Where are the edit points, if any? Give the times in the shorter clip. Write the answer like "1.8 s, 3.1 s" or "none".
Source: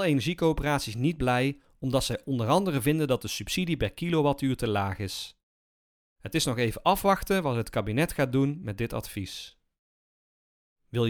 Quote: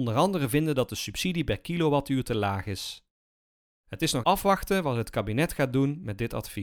4.2 s